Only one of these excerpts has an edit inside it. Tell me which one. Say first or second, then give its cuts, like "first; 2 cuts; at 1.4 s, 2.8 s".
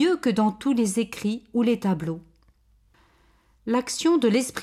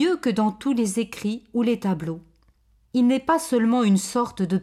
second; 1 cut; at 2.8 s